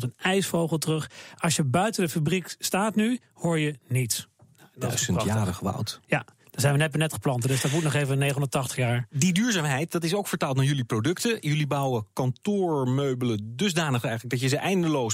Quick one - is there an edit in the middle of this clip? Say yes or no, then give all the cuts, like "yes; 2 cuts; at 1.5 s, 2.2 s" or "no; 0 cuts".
no; 0 cuts